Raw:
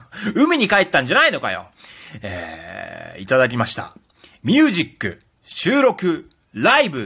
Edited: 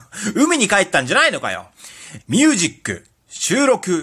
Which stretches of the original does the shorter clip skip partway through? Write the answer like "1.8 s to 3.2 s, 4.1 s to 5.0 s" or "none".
2.2 s to 4.3 s